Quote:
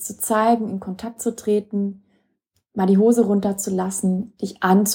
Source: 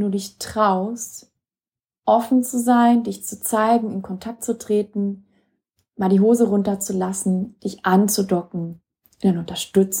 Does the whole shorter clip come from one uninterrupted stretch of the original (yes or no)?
yes